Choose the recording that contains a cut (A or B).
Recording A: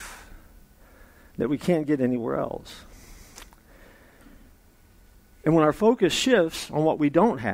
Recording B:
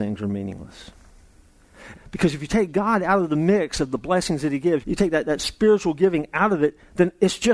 B